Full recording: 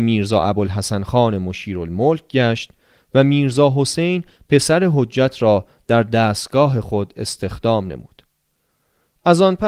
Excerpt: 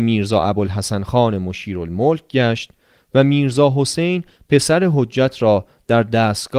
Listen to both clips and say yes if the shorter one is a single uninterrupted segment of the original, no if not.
yes